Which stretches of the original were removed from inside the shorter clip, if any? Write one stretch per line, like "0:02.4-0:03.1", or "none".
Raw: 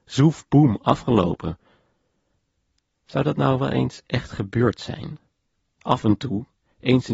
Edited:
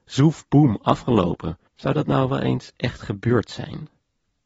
0:01.7-0:03.0